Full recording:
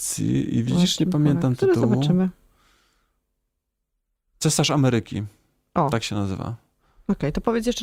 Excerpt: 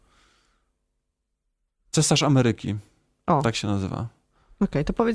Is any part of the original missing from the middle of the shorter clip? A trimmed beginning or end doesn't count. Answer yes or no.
no